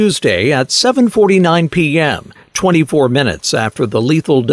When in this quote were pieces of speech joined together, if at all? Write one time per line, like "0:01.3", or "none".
none